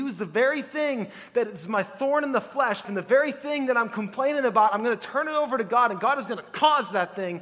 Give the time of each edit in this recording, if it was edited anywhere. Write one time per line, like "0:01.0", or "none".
0:02.8

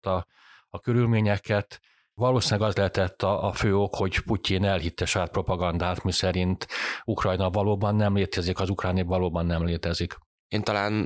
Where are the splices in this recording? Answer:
none

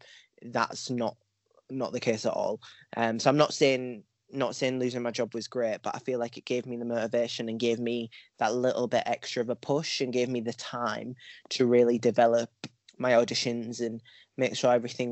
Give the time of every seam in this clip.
none

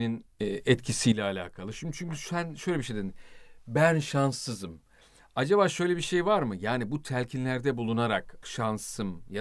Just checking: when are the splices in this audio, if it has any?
0:08.4

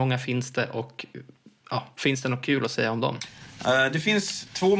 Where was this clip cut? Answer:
none

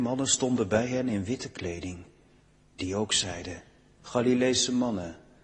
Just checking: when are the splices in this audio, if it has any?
none

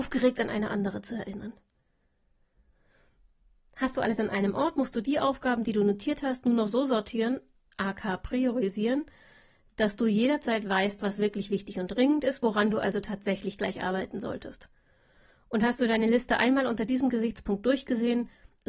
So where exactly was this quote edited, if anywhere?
none

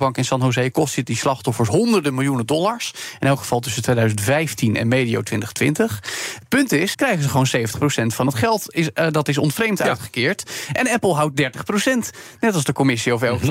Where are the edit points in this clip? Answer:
0:06.9

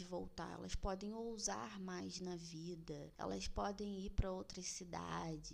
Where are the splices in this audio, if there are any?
none

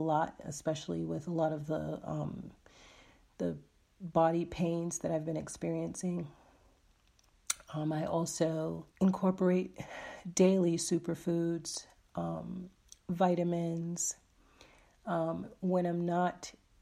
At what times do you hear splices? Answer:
0:08.9

